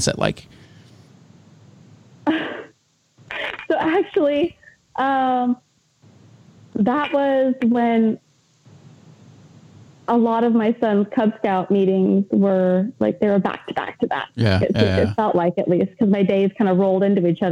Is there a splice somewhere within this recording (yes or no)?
no